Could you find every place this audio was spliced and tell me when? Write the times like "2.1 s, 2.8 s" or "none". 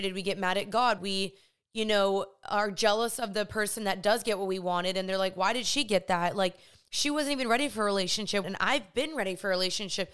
1.0 s, 8.4 s